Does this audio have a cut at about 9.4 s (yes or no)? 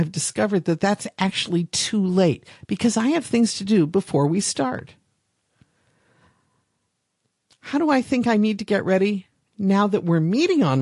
yes